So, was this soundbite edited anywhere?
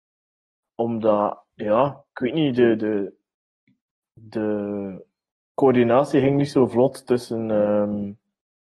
no; 0 cuts

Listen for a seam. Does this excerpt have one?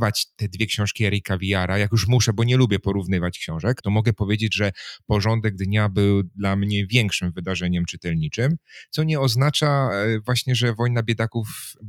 yes; 1 cut; at 3.8 s

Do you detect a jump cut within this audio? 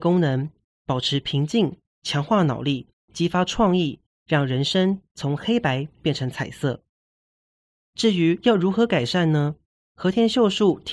no; 0 cuts

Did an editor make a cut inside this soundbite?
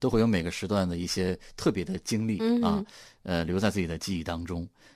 no; 0 cuts

